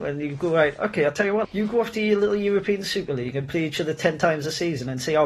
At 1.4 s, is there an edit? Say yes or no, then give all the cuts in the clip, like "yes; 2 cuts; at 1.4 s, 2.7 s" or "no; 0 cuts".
yes; 1 cut; at 1.4 s